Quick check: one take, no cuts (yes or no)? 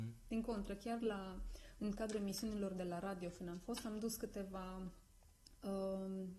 yes